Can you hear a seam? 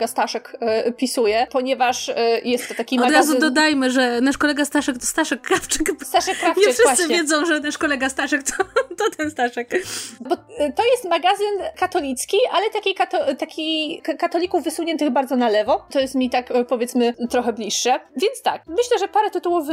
yes; 2 cuts; at 10.3 s, 15.9 s

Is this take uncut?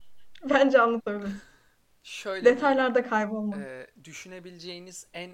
yes; 0 cuts

